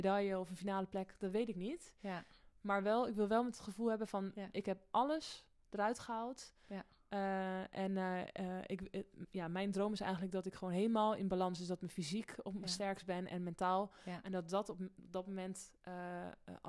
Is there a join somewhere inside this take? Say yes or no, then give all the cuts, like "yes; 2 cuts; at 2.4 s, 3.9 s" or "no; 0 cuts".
no; 0 cuts